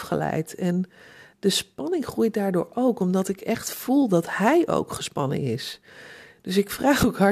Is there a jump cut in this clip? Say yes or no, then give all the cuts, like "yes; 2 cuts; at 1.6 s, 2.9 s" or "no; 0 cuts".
no; 0 cuts